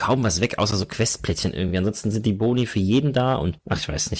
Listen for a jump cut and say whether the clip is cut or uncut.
uncut